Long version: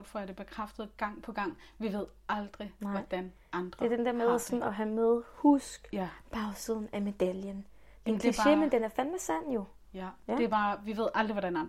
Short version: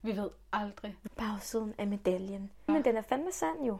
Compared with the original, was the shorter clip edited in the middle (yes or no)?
yes